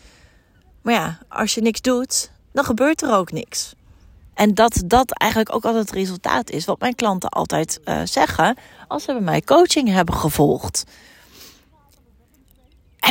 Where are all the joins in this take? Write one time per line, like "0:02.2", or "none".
0:04.3